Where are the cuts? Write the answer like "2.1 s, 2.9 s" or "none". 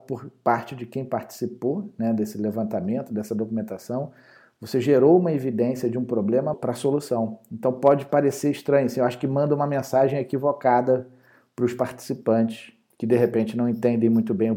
6.5 s